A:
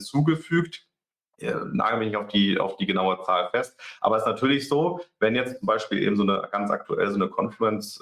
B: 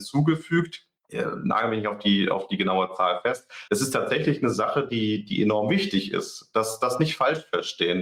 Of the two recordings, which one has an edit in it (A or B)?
B